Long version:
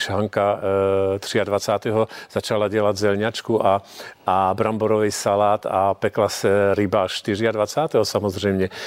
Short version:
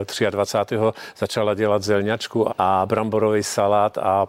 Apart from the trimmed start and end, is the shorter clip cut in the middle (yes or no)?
yes